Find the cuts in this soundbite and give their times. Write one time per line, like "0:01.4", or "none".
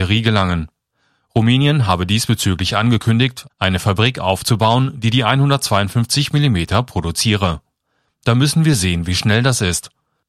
none